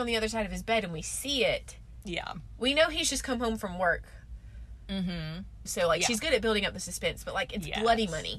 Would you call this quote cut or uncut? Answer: cut